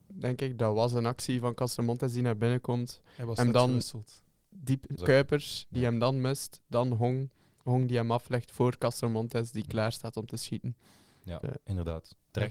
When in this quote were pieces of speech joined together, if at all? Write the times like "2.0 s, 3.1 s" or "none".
5.0 s, 11.4 s